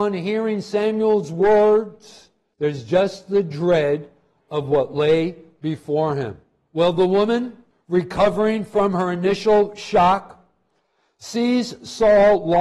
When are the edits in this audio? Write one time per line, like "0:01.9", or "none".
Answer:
0:02.5